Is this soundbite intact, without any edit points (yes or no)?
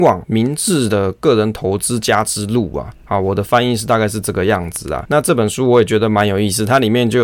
yes